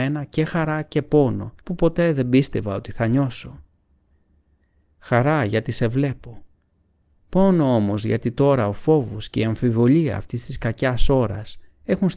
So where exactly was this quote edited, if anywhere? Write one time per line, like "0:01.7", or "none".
0:01.6